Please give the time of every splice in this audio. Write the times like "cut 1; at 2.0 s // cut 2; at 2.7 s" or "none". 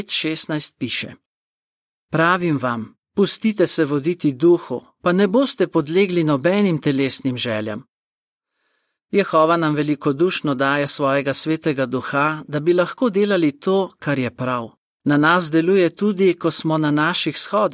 cut 1; at 15.0 s